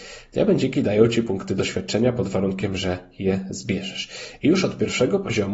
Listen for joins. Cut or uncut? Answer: uncut